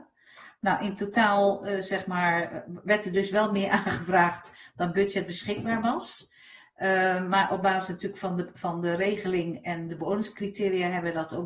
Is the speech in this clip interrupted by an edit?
yes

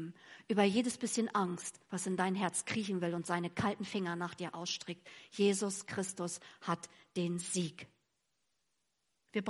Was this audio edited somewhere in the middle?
no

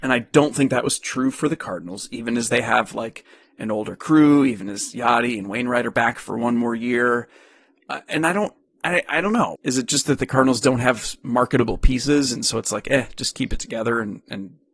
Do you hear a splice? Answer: yes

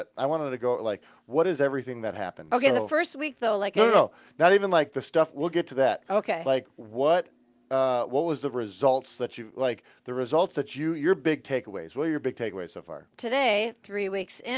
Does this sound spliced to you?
yes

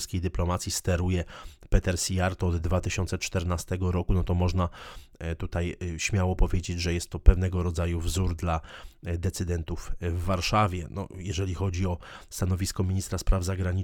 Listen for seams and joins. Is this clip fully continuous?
yes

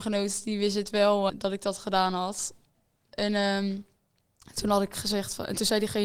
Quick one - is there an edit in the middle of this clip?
yes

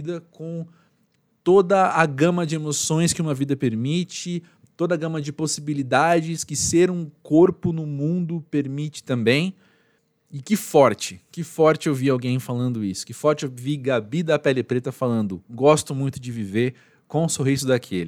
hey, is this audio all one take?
yes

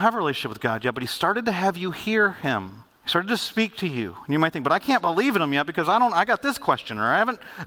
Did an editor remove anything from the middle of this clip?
yes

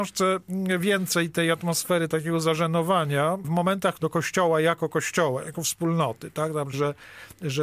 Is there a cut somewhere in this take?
yes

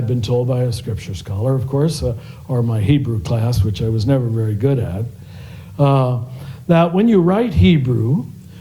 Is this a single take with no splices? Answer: yes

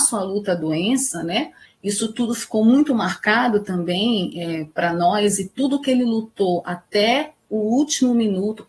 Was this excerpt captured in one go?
no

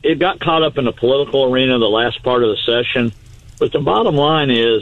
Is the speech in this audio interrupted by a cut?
no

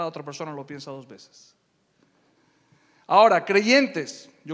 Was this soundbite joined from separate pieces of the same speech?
no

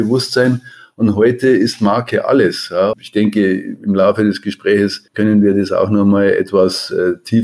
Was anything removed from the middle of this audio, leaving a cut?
yes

